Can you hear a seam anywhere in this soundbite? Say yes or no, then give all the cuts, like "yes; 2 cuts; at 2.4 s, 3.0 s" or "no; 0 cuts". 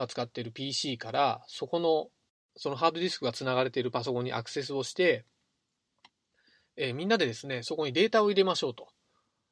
no; 0 cuts